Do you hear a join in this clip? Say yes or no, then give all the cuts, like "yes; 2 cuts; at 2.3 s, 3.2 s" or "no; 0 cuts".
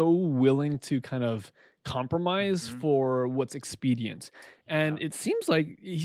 no; 0 cuts